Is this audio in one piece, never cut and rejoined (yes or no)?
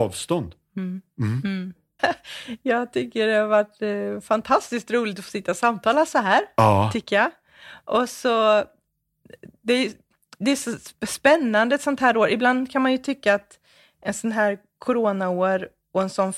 no